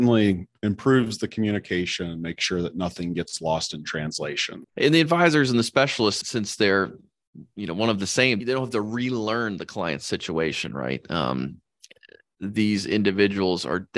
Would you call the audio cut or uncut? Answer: cut